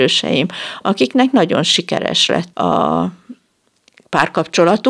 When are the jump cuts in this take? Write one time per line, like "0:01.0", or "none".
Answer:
0:02.5